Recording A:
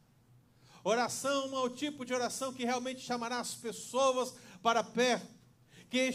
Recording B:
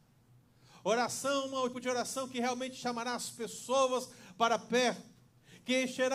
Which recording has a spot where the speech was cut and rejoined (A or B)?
B